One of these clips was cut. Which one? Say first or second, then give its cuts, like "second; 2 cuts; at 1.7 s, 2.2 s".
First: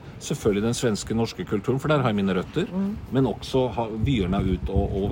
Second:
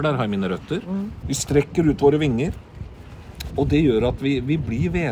second; 2 cuts; at 1.2 s, 3.5 s